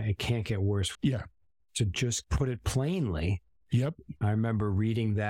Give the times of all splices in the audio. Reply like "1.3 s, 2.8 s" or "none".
0.9 s, 4.2 s